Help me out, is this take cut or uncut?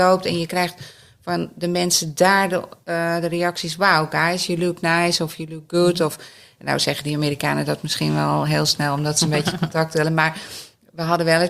uncut